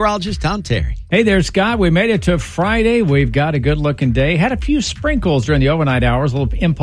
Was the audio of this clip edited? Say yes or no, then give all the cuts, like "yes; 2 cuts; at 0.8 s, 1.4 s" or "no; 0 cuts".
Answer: no; 0 cuts